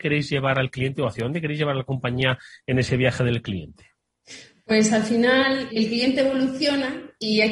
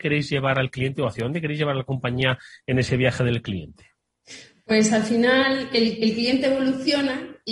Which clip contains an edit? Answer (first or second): first